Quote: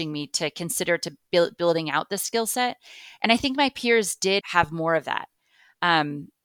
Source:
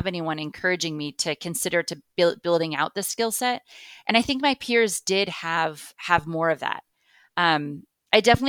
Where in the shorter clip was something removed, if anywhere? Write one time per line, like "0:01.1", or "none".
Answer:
0:04.4